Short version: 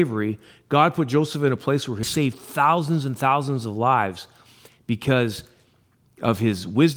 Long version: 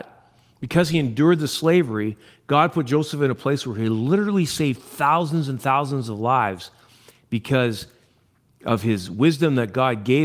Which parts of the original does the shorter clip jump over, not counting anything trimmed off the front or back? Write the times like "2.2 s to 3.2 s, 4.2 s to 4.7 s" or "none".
3.8 s to 4.5 s